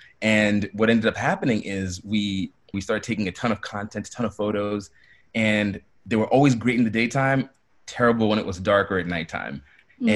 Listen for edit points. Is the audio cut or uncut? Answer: cut